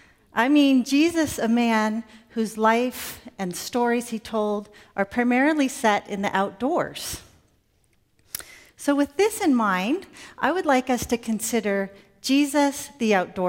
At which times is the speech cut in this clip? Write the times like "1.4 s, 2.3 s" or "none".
8.7 s

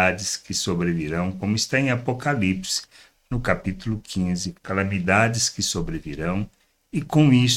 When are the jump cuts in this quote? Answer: 4.6 s

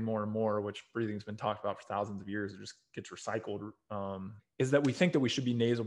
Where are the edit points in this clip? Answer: 4.4 s

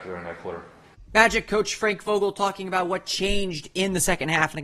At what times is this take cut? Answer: 1.1 s

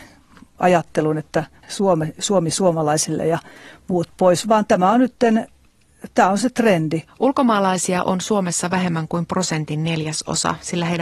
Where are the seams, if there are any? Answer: 4.4 s, 7.1 s

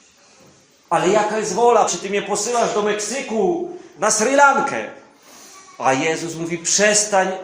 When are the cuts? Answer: 1.9 s, 3.9 s

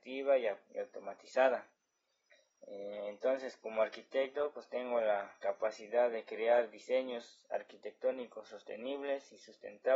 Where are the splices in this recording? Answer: none

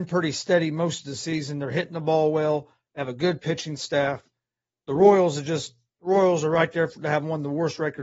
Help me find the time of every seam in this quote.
none

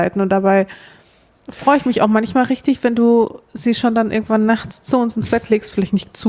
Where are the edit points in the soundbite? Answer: none

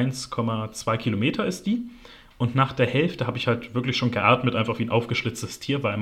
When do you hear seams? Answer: none

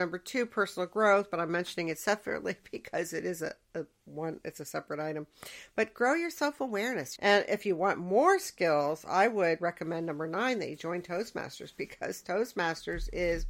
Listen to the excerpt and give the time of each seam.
7.2 s

